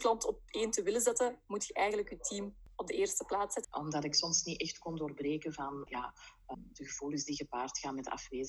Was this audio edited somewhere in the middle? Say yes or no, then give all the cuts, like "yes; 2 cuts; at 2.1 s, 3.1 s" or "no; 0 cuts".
yes; 2 cuts; at 3.6 s, 5.9 s